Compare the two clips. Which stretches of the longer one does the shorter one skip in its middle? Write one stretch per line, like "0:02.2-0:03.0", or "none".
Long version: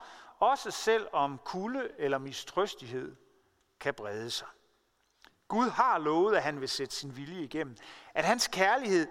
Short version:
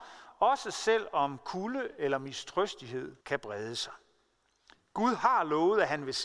0:03.2-0:03.7